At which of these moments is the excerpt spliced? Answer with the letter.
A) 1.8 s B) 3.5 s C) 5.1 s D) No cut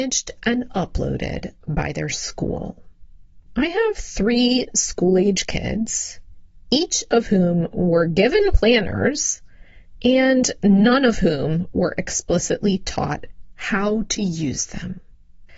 B